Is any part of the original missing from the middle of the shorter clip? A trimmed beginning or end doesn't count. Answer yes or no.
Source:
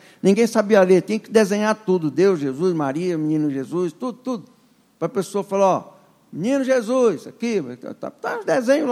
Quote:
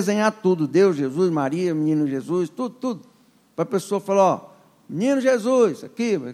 no